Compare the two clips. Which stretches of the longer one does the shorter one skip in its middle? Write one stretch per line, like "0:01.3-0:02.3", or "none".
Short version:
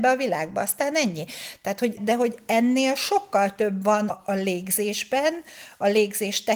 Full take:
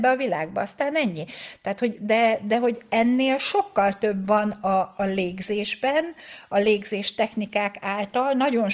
0:02.0-0:02.4
0:04.5-0:04.8